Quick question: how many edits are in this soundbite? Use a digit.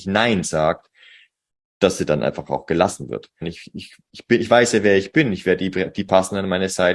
1